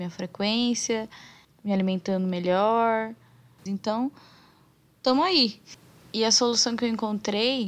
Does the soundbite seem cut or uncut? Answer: cut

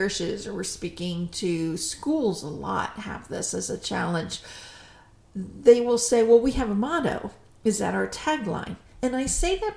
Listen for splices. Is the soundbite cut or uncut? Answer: cut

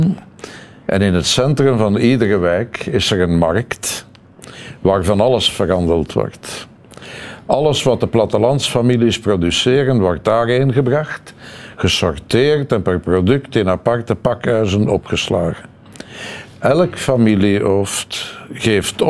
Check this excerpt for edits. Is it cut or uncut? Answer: uncut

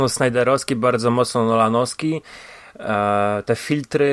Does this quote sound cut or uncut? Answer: uncut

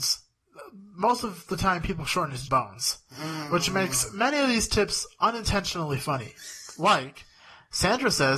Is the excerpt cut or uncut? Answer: cut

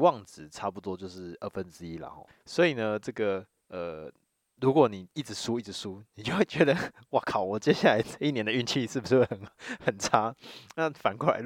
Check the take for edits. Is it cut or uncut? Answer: uncut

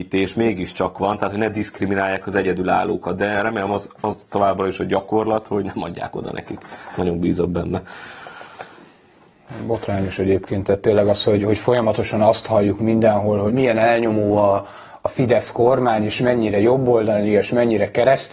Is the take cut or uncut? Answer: cut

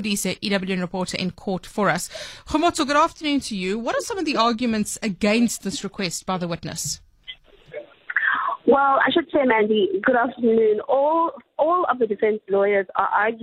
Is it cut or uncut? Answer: uncut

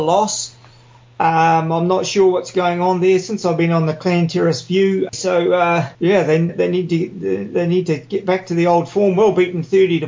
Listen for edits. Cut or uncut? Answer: cut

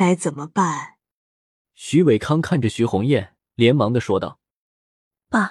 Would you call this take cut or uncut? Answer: cut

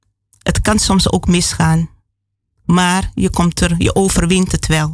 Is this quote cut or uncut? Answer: uncut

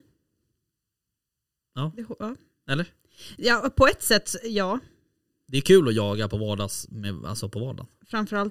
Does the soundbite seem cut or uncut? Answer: uncut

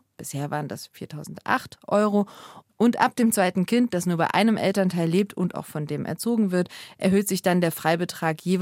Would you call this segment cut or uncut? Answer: uncut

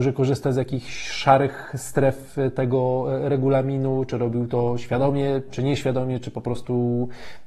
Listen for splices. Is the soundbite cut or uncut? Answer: uncut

